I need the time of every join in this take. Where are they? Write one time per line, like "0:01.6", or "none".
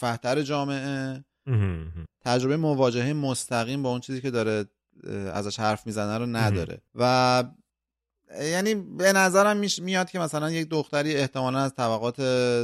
0:02.1
0:06.9